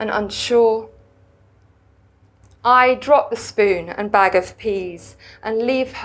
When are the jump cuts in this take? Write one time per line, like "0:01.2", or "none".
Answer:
none